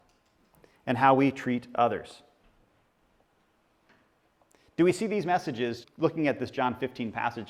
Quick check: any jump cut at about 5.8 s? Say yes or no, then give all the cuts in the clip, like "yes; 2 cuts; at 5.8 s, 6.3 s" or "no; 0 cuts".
yes; 1 cut; at 5.8 s